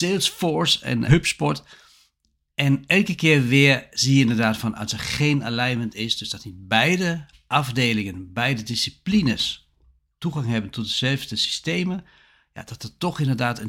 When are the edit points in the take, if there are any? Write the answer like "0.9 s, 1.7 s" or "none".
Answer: 1.1 s